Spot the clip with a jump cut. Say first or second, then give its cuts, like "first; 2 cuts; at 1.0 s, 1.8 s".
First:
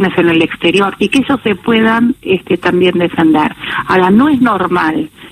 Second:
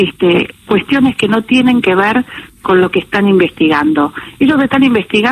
first; 1 cut; at 1.0 s